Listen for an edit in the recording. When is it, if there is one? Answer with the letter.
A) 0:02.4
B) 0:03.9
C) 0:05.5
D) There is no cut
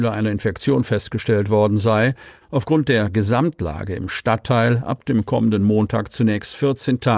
A